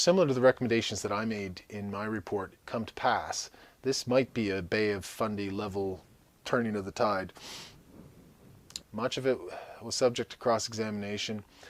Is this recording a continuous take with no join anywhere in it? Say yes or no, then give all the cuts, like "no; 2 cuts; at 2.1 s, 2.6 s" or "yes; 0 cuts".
no; 2 cuts; at 2.6 s, 8.8 s